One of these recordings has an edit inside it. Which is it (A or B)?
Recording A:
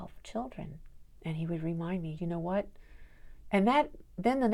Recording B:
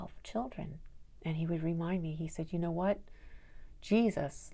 A